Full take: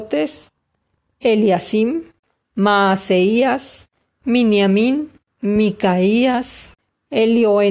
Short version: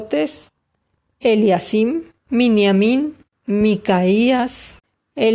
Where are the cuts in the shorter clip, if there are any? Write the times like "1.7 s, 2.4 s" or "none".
2.2 s

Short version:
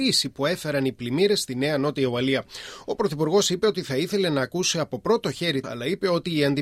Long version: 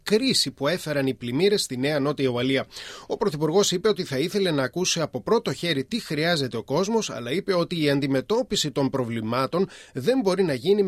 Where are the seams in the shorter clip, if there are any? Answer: 5.6 s

